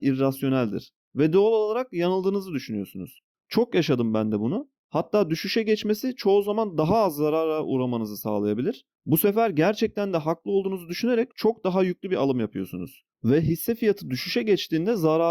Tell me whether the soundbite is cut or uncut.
cut